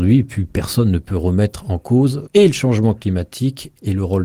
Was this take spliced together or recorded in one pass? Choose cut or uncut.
uncut